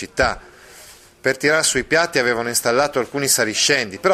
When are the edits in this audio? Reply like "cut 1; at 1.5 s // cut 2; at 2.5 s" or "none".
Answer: none